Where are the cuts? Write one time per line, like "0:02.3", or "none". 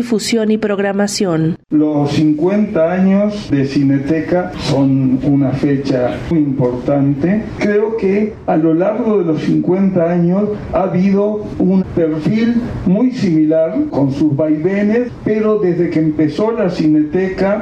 0:06.3